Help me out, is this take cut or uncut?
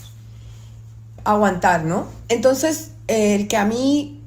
cut